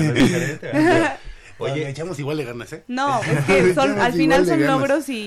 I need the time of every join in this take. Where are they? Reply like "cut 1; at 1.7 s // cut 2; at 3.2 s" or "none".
cut 1; at 3.2 s